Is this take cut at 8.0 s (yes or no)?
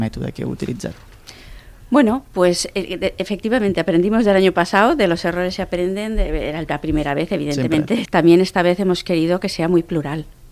yes